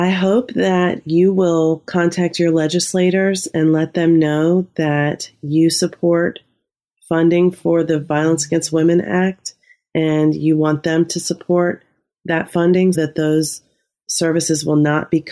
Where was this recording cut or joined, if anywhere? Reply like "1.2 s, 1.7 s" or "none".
12.9 s